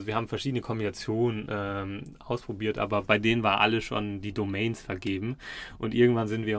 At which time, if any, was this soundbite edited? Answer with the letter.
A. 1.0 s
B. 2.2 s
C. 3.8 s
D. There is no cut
D